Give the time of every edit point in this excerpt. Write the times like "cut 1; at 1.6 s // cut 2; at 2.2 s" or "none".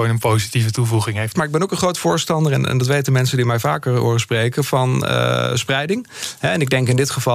cut 1; at 1.3 s